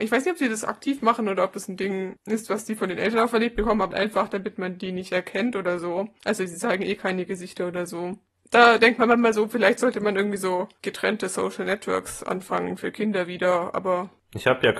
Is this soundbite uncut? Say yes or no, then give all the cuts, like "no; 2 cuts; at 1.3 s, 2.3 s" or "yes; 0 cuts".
no; 1 cut; at 3.9 s